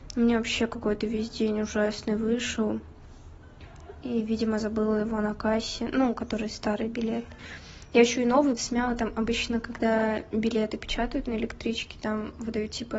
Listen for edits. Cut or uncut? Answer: cut